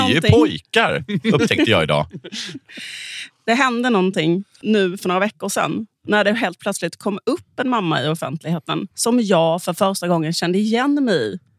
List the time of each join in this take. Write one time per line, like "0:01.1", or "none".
0:08.9